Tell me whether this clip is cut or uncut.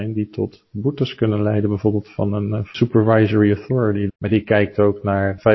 cut